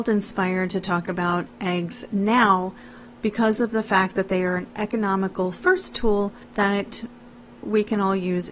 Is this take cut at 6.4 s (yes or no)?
yes